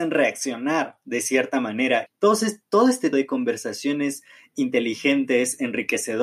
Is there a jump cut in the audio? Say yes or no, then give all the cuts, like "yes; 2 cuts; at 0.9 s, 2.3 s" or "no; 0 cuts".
yes; 2 cuts; at 2.1 s, 3.1 s